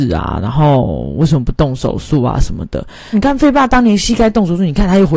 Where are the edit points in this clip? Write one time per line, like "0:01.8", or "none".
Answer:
0:03.1